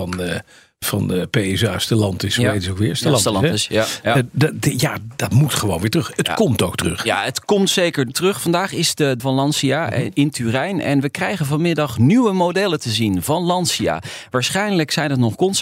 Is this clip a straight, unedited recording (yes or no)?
no